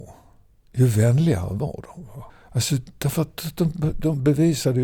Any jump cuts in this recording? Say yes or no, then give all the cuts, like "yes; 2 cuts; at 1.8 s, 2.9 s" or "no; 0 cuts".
no; 0 cuts